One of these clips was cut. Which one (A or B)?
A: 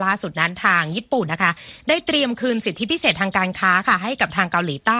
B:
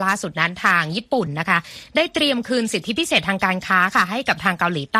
A